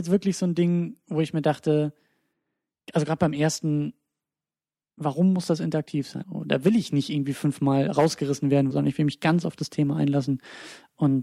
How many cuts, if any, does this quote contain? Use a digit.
2